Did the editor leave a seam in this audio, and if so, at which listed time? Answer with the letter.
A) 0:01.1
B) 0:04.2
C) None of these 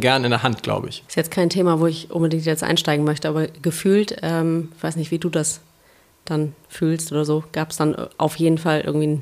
A